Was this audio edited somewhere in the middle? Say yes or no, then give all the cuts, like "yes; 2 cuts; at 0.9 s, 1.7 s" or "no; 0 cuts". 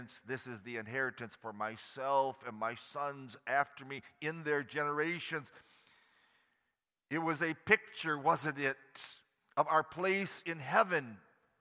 no; 0 cuts